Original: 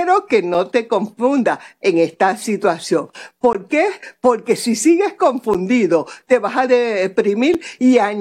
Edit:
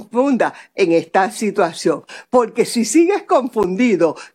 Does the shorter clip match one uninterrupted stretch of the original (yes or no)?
no